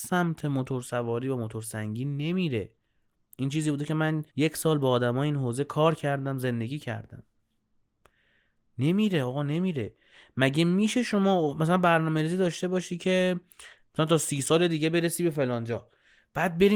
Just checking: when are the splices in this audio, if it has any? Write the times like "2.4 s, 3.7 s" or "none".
4.3 s

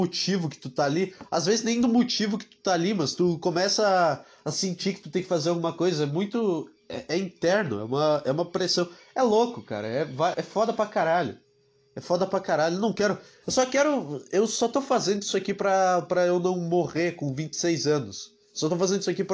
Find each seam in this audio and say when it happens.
10.3 s

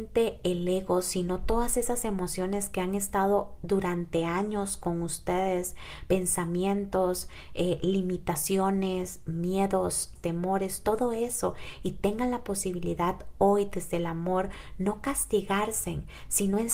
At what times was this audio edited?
10.2 s

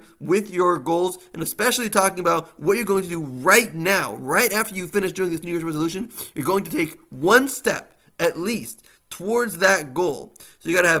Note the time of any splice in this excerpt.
none

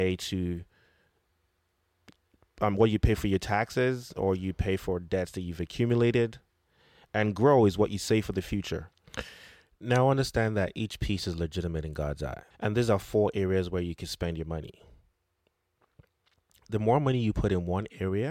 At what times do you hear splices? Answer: 12.5 s

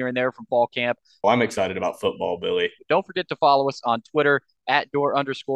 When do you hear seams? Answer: 1.2 s, 2.8 s

